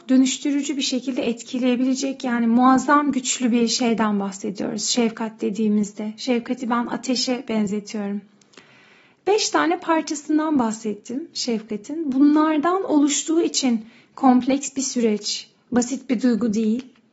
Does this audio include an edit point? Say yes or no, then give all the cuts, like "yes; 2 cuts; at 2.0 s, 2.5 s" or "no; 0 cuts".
no; 0 cuts